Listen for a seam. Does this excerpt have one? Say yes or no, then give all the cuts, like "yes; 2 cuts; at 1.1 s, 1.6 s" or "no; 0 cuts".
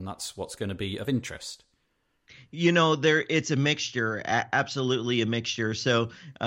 no; 0 cuts